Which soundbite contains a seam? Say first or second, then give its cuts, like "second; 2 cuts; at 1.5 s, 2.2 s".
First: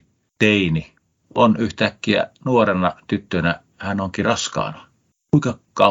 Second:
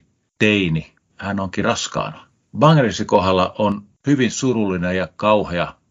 second; 2 cuts; at 1.1 s, 2.4 s